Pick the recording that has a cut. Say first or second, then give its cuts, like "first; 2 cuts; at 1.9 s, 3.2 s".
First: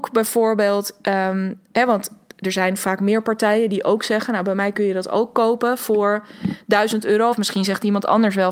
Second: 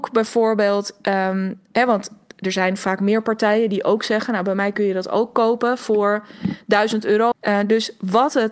second; 1 cut; at 7.3 s